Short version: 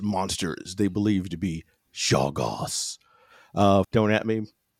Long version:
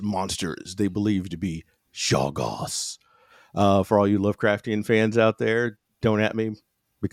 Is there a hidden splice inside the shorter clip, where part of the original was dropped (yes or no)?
yes